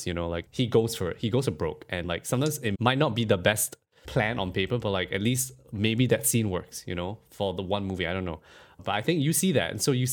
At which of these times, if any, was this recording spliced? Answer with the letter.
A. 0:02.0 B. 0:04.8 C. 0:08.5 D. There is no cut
D